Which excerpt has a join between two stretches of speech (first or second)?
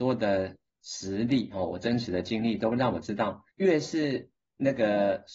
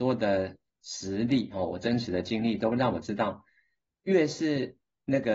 first